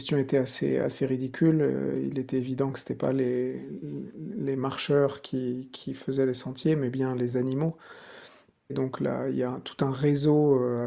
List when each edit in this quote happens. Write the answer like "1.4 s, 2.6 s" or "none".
8.7 s